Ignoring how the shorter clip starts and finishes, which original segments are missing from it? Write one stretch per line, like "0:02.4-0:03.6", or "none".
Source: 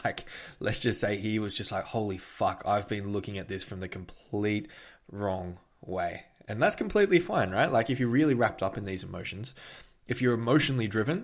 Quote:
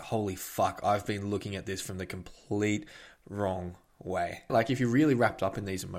0:06.3-0:07.7